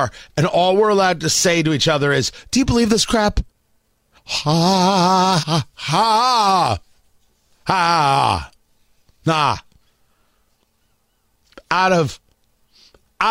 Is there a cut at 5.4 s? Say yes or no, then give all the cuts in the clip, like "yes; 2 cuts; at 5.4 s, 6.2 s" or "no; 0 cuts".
yes; 2 cuts; at 4.2 s, 5.4 s